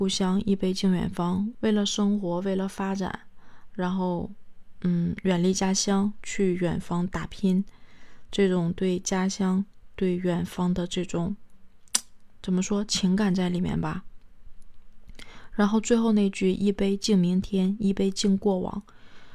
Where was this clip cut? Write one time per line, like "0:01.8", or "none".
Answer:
0:01.5